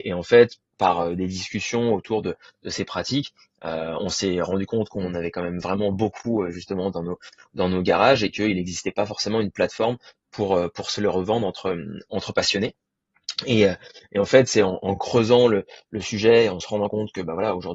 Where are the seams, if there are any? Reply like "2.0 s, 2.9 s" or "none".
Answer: none